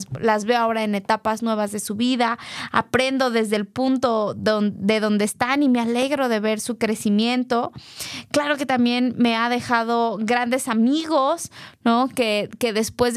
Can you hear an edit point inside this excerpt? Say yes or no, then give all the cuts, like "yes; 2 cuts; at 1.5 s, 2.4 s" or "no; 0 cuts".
no; 0 cuts